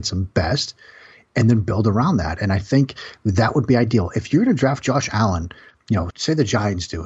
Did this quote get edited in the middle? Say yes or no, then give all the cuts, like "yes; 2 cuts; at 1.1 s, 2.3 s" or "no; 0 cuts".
yes; 1 cut; at 6.1 s